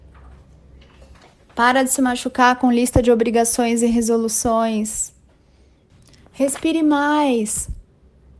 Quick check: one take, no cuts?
yes; 0 cuts

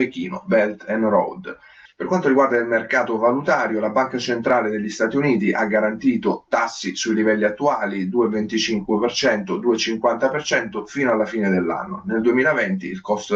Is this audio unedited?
no; 1 cut; at 1.9 s

